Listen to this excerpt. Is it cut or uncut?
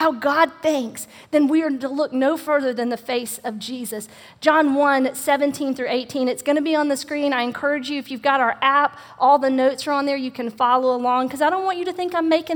uncut